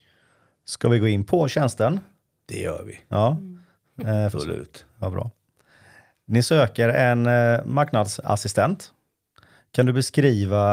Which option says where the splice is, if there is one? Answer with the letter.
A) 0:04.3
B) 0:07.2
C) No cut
A